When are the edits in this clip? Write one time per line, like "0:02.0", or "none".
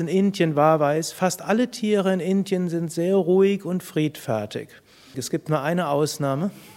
0:05.1

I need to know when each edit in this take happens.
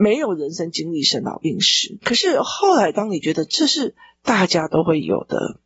0:02.0

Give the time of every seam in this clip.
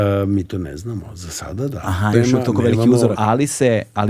0:02.1
0:03.2

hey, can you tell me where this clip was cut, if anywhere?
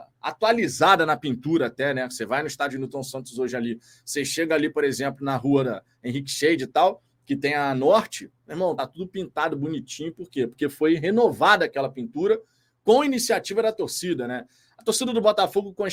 none

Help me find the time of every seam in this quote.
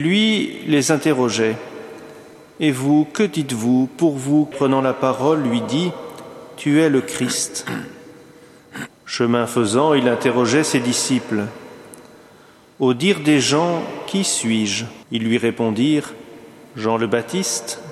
0:04.5
0:08.9
0:15.0

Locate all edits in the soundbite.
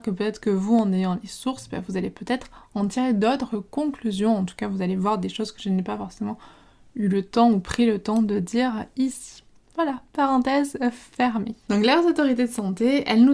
none

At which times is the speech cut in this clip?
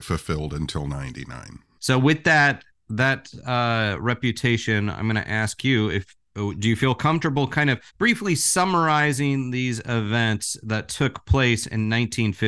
0:01.8
0:07.9

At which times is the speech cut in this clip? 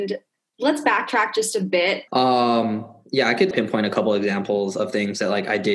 0:02.1
0:03.5

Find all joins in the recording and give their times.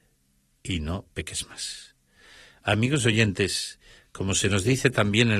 none

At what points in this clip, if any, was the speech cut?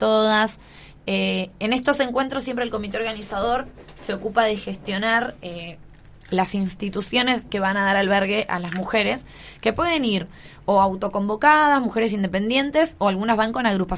none

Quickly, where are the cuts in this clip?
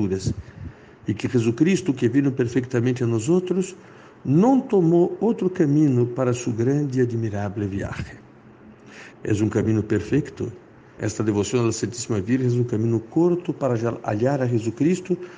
0:09.1
0:11.0

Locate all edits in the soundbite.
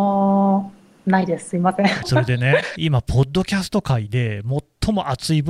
0:02.0

